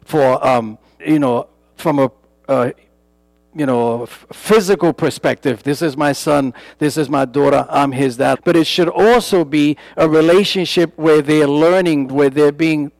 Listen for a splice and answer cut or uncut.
cut